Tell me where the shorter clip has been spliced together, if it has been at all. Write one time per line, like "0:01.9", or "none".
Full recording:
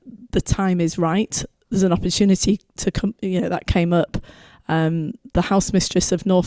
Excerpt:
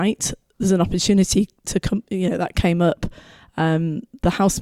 none

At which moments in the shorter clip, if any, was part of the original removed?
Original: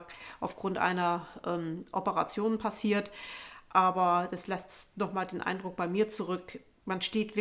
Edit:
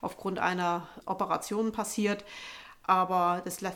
0:01.0

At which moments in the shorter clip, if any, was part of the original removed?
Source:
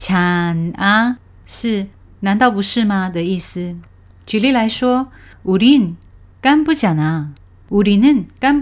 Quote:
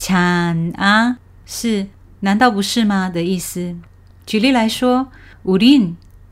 none

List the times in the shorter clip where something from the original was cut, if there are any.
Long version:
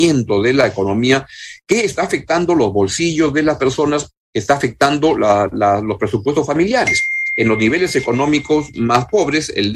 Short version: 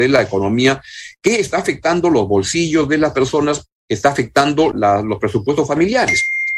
0:04.7

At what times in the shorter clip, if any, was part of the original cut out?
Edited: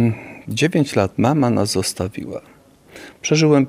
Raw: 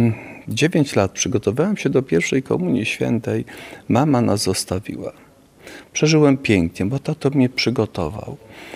0:01.1

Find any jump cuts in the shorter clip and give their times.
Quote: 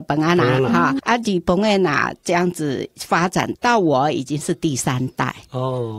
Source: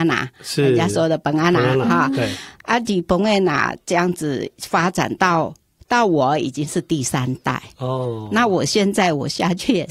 0:01.0
0:03.5

